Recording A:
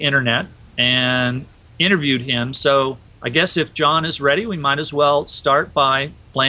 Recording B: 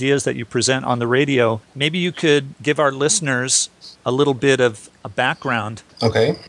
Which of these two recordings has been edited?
B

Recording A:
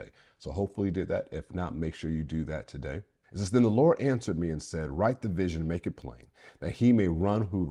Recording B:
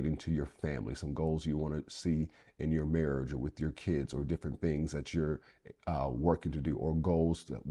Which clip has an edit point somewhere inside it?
A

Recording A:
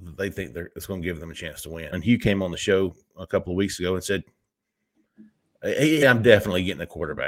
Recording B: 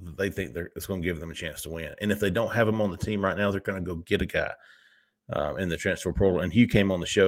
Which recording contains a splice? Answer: A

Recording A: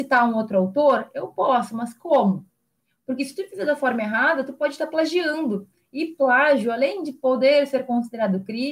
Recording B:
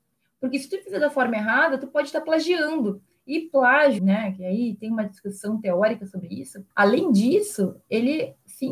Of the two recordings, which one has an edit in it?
B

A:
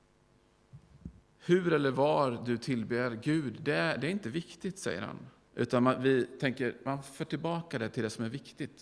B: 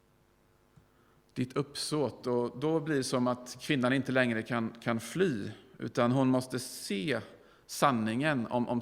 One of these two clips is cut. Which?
A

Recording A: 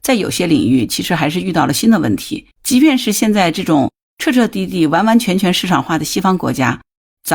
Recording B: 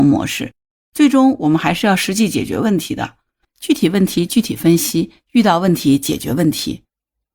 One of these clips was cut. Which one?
A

